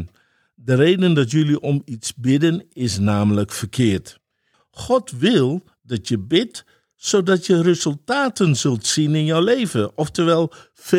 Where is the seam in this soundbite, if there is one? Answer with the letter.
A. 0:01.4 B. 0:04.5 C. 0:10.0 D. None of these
B